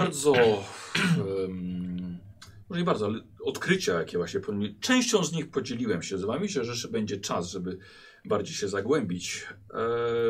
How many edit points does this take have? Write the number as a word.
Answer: zero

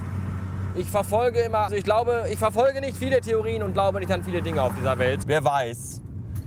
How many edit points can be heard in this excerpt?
two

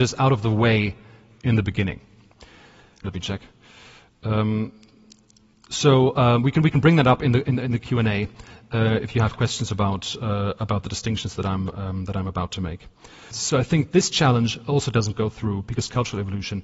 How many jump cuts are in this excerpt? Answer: two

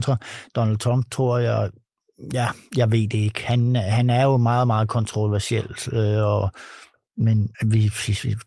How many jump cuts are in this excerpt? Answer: one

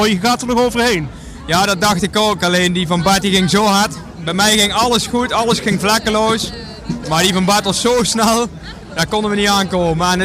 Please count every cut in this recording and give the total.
one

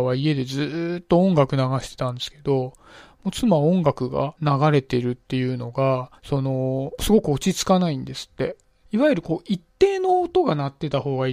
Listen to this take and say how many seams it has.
two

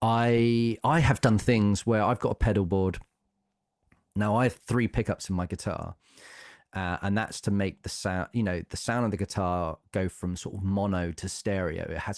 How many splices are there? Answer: zero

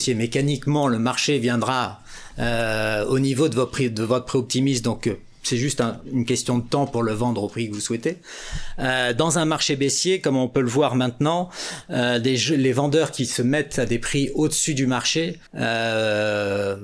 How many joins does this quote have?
one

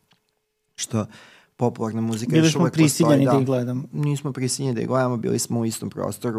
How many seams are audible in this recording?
zero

